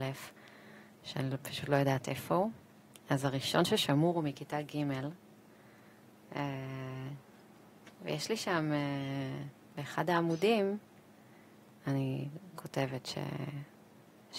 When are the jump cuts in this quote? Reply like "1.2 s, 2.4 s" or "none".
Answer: none